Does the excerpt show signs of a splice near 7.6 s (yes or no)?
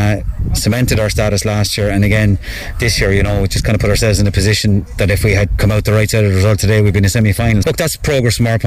yes